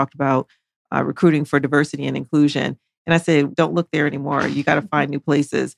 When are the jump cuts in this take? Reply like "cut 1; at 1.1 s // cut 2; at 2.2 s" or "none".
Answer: cut 1; at 3.5 s